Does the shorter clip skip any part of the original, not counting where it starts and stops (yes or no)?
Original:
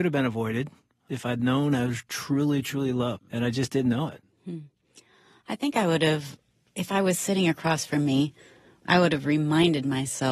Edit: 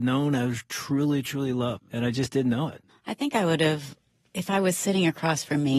yes